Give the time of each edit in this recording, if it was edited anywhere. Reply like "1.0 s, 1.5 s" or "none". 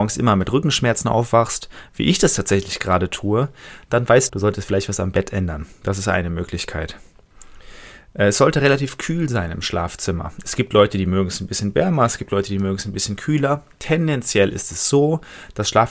4.3 s, 5.7 s